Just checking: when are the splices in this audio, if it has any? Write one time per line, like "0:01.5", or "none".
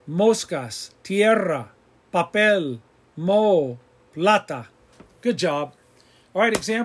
0:01.0

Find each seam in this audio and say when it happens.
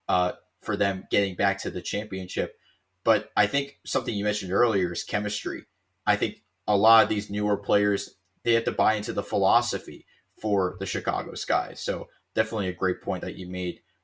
none

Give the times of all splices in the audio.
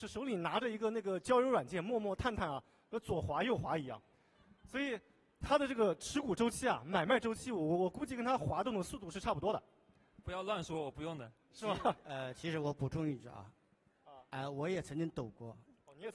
none

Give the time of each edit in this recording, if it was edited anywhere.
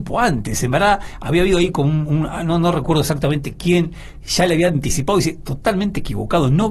none

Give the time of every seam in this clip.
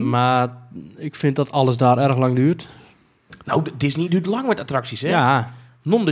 none

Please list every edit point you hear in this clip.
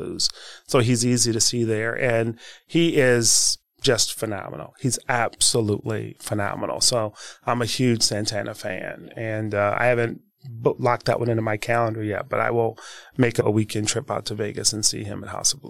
none

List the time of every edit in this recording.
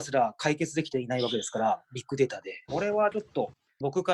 0:02.7

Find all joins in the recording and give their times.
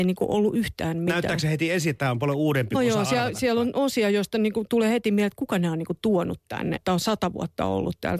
0:02.7
0:06.8

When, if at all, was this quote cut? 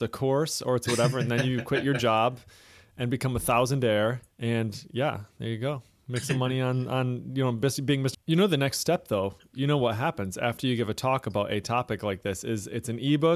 0:04.3
0:08.1

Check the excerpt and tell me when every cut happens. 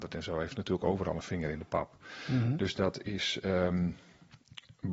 none

